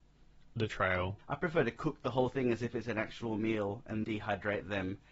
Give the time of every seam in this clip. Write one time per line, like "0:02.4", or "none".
0:01.2
0:04.0